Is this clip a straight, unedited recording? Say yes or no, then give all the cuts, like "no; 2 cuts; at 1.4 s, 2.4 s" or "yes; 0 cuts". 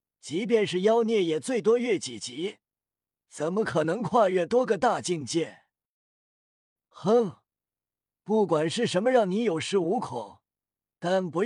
yes; 0 cuts